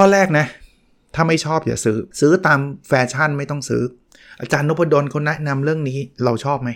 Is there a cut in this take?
yes; 1 cut; at 2.1 s

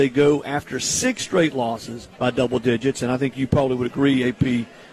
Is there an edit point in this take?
yes; 1 cut; at 2.1 s

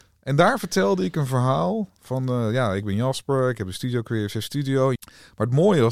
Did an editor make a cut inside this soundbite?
yes; 1 cut; at 4.9 s

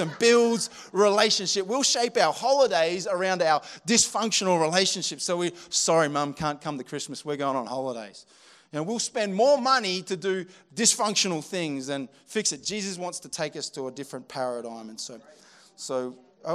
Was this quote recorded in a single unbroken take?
yes; 0 cuts

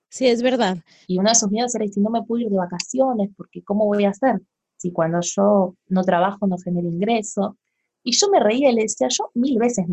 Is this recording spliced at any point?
yes; 1 cut; at 1.0 s

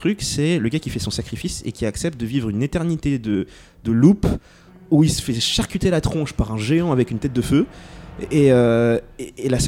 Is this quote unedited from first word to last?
yes; 0 cuts

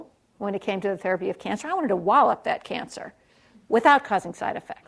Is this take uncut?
yes; 0 cuts

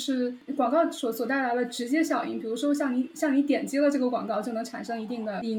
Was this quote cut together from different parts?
no; 0 cuts

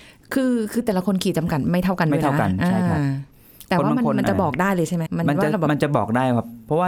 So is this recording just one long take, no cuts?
no; 1 cut; at 5.1 s

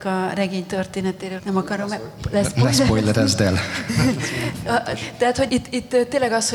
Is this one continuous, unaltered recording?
no; 2 cuts; at 1.4 s, 5.5 s

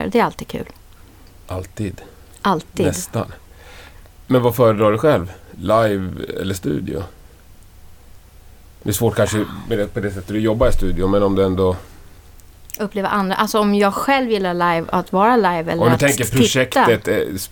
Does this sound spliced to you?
yes; 1 cut; at 12.7 s

